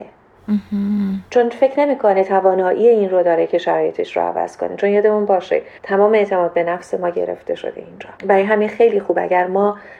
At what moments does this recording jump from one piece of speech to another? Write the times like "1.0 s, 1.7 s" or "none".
5.8 s, 8.2 s